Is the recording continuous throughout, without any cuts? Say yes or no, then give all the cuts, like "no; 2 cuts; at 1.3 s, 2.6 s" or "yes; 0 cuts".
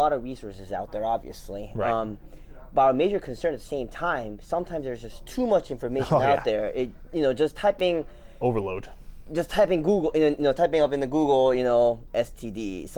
yes; 0 cuts